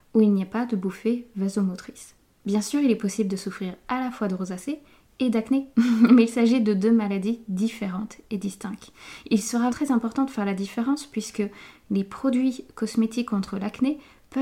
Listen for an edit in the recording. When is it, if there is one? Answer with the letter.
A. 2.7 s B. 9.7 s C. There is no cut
B